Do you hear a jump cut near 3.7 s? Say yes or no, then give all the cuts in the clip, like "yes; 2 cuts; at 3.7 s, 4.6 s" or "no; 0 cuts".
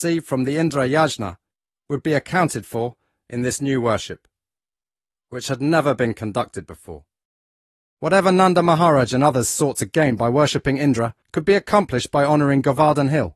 no; 2 cuts; at 8.0 s, 11.2 s